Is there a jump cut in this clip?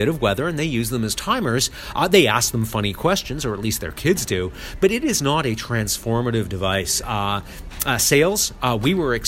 no; 0 cuts

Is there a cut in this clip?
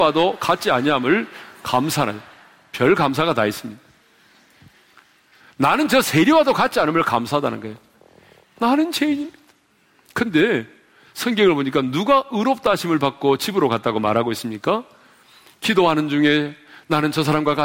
yes; 1 cut; at 8.4 s

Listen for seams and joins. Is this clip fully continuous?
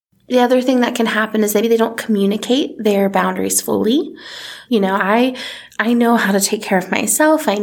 no; 2 cuts; at 1.6 s, 4.7 s

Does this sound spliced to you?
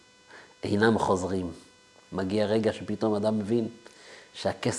yes; 1 cut; at 2.1 s

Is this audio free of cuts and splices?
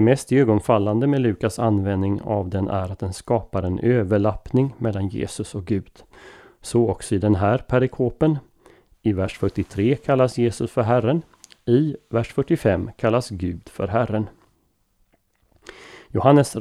yes; 0 cuts

